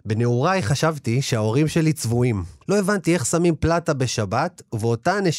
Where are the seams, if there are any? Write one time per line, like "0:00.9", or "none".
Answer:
0:02.6